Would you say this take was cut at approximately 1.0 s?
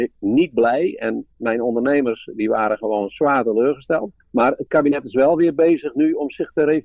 no; 1 cut; at 4.2 s

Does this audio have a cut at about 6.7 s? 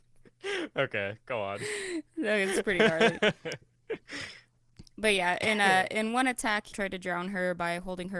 yes; 1 cut; at 6.7 s

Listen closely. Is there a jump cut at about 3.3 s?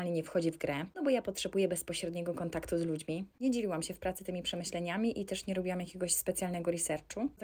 yes; 1 cut; at 3.3 s

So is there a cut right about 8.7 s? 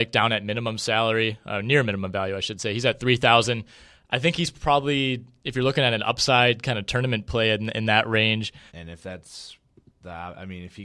yes; 1 cut; at 8.7 s

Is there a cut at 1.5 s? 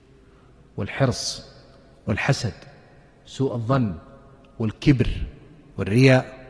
no; 0 cuts

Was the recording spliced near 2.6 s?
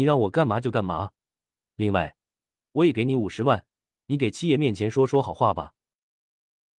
no; 0 cuts

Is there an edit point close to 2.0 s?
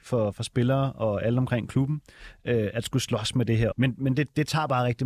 no; 1 cut; at 3.7 s

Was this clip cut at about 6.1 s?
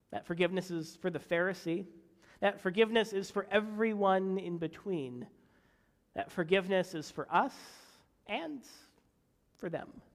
no; 0 cuts

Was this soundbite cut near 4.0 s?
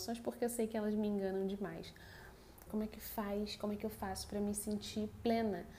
no; 1 cut; at 2.7 s

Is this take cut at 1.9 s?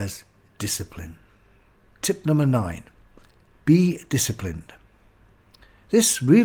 yes; 1 cut; at 1.9 s

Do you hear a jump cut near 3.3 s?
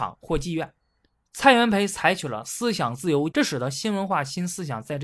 yes; 2 cuts; at 1.2 s, 3.3 s

